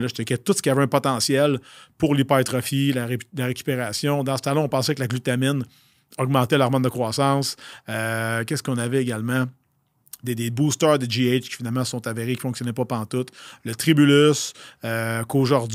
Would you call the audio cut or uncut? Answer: uncut